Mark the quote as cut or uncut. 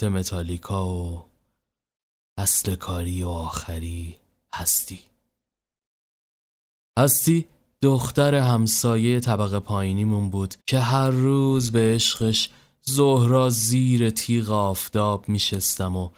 cut